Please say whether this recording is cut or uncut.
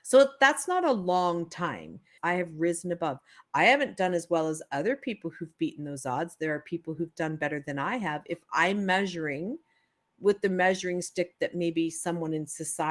cut